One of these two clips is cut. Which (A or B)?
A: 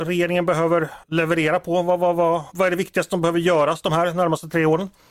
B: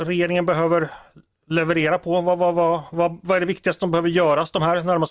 A